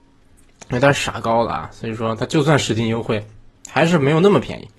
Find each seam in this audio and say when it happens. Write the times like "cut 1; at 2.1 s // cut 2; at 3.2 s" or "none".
none